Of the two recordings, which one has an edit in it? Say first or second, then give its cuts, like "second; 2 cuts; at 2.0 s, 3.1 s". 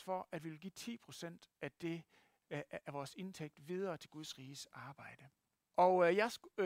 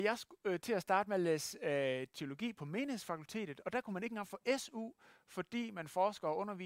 first; 1 cut; at 5.6 s